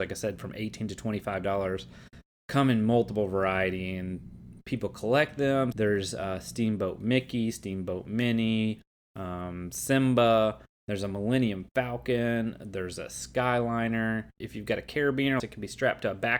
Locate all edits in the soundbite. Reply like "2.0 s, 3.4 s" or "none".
5.7 s, 14.4 s, 15.4 s